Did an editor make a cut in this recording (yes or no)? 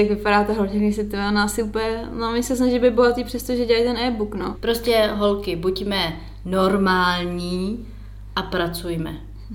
yes